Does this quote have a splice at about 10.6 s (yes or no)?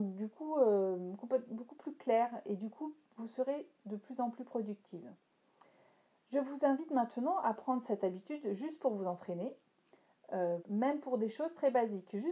yes